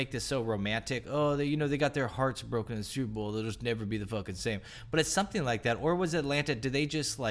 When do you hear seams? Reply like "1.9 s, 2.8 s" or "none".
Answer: 1.0 s